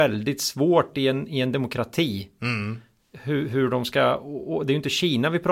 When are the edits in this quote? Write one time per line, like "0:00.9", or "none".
none